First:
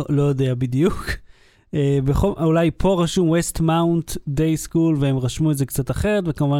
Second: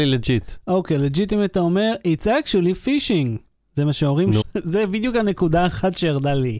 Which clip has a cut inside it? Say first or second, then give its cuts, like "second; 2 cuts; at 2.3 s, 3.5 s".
second; 1 cut; at 4.4 s